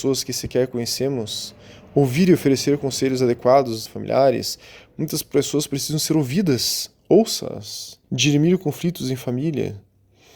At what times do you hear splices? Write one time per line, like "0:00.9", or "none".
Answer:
0:03.9
0:08.0